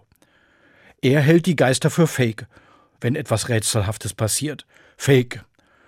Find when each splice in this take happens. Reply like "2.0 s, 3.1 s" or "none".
2.9 s